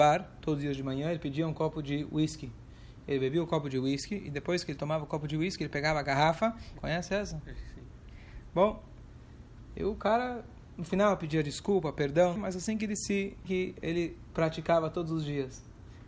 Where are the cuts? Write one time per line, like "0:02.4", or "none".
0:06.8
0:12.4
0:13.4